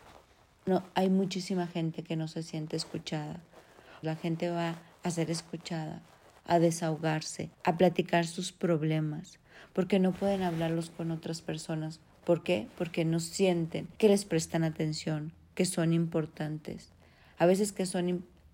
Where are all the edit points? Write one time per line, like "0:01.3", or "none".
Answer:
0:04.0
0:07.5
0:14.0